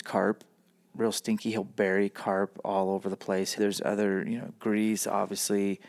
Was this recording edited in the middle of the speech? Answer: yes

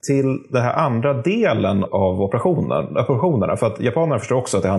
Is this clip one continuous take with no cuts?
no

